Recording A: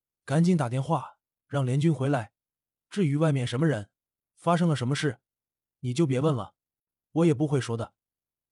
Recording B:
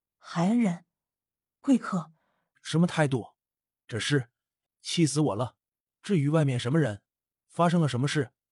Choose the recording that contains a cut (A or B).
B